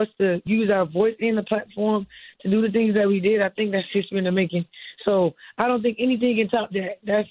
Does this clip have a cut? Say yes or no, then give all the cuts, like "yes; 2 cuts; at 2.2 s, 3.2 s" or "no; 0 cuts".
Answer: no; 0 cuts